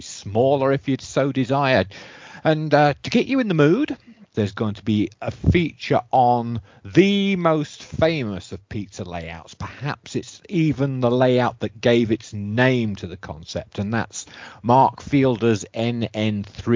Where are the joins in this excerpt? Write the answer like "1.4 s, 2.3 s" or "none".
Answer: 4.3 s